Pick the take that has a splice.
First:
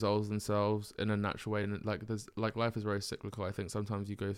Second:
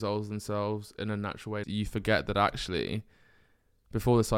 second; 1 cut; at 1.6 s

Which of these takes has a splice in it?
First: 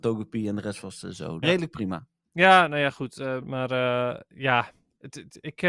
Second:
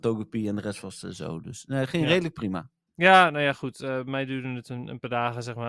first; 2 cuts; at 1.4 s, 3.4 s

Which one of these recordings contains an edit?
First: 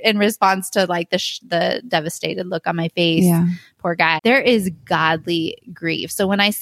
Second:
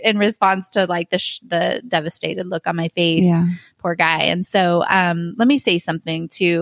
first; 1 cut; at 4.2 s

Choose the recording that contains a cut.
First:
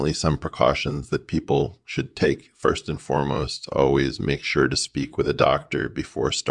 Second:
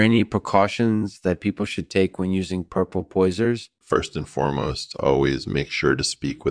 second; 1 cut; at 3.8 s

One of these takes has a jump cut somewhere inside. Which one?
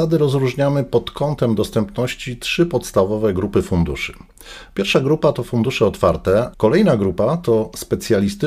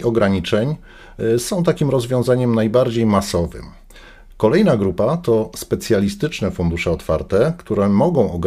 first; 1 cut; at 6.5 s

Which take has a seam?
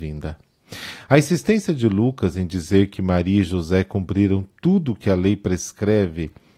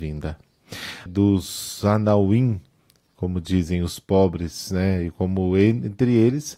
second; 1 cut; at 1.1 s

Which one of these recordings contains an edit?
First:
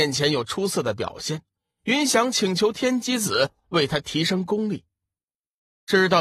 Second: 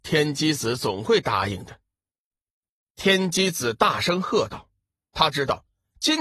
second; 1 cut; at 2.2 s

